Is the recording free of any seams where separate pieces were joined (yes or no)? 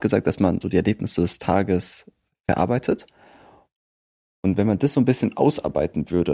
yes